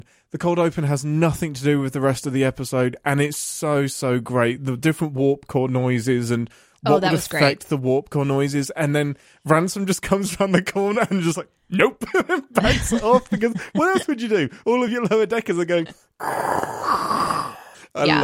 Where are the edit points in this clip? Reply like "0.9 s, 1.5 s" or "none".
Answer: none